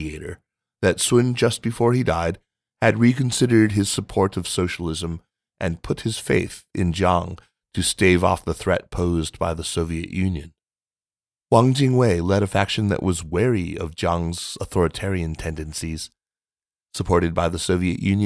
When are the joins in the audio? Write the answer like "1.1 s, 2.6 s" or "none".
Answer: none